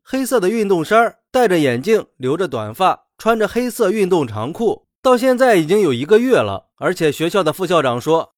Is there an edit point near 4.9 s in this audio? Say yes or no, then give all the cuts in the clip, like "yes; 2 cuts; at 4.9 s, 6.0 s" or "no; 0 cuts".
yes; 1 cut; at 4.9 s